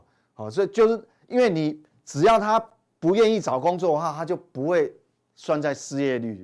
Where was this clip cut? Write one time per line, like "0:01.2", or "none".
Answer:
none